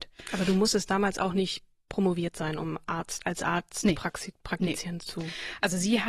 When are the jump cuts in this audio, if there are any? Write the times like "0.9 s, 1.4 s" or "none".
none